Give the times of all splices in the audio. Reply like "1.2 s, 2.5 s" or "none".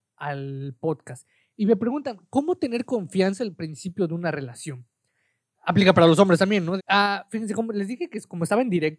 5.5 s, 6.8 s

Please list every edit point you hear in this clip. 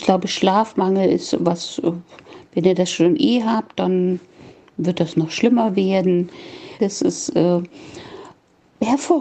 6.8 s

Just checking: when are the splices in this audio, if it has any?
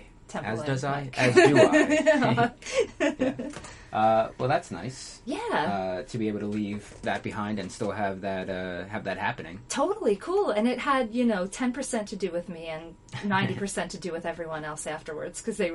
none

